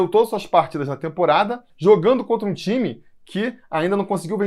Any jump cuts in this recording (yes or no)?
yes